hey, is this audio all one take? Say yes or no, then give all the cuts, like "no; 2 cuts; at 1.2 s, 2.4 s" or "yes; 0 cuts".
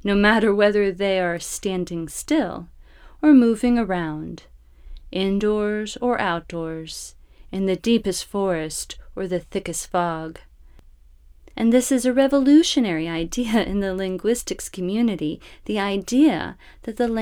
no; 1 cut; at 11.5 s